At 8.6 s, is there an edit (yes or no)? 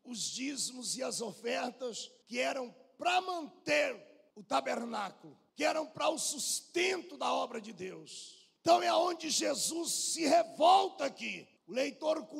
yes